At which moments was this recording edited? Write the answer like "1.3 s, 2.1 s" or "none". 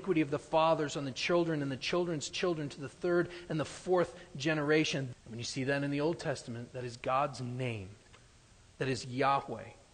5.1 s